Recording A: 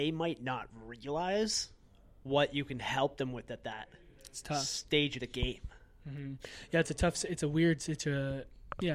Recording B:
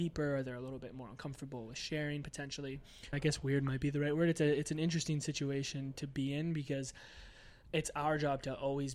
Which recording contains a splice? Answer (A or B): B